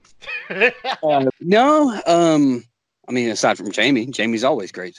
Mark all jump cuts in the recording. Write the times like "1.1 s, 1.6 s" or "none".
1.3 s